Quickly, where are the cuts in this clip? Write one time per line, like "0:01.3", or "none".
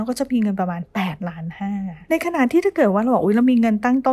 none